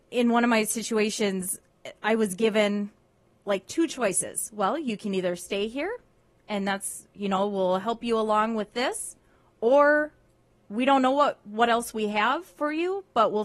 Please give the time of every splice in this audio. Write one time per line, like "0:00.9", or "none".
none